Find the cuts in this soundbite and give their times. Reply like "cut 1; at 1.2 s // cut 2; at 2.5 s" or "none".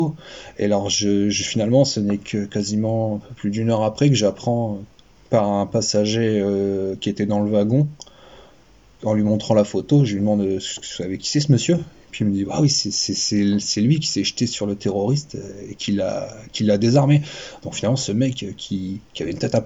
none